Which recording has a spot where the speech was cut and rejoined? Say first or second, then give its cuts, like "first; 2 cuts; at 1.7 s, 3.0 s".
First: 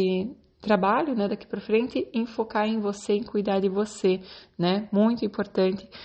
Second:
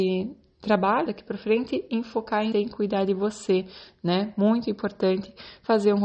second; 2 cuts; at 1.1 s, 2.5 s